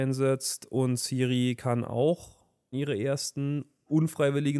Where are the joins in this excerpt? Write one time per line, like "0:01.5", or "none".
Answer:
0:02.7